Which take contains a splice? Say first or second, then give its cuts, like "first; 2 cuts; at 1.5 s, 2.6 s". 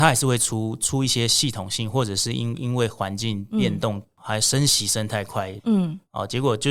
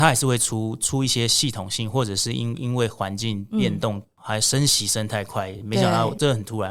first; 1 cut; at 5.6 s